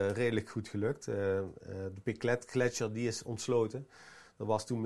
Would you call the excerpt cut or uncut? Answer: uncut